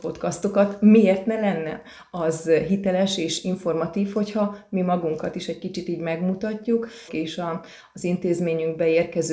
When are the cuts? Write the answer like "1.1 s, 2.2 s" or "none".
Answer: 7.1 s